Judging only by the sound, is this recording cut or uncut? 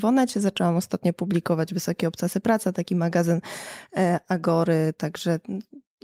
uncut